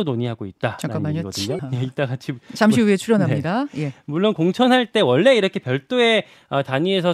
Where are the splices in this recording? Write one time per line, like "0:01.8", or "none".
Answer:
0:01.6